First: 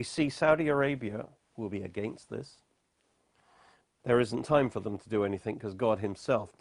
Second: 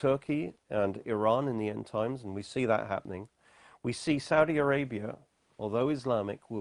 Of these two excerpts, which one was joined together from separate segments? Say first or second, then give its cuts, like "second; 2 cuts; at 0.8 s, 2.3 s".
first; 2 cuts; at 1.5 s, 4.0 s